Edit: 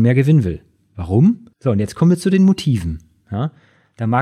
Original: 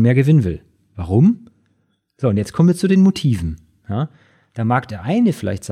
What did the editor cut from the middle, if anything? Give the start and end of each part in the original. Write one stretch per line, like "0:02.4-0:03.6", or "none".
0:01.5-0:02.1